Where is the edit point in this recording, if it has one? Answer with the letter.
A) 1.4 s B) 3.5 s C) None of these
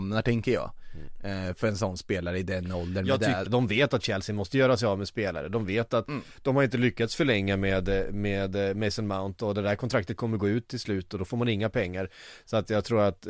B